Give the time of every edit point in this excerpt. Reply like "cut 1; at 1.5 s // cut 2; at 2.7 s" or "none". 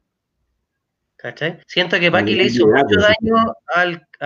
cut 1; at 1.6 s